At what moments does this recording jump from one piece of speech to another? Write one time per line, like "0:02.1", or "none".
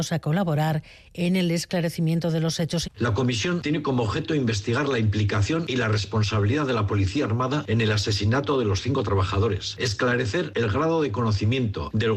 0:02.8